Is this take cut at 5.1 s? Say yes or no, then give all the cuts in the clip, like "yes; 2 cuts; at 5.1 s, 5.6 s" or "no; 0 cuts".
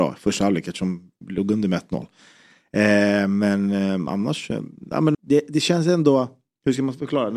yes; 1 cut; at 5.1 s